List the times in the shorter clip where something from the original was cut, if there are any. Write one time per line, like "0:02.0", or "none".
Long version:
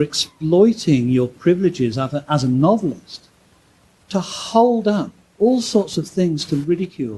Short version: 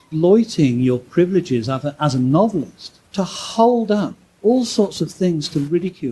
0:03.1